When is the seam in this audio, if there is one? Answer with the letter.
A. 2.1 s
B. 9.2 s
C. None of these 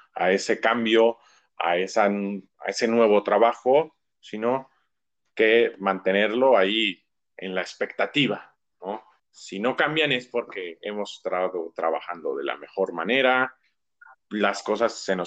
B